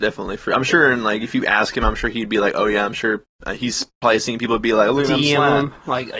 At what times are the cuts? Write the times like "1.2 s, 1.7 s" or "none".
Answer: none